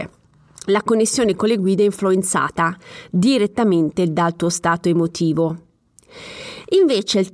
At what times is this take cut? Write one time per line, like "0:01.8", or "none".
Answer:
none